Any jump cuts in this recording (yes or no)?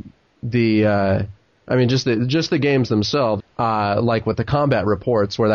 yes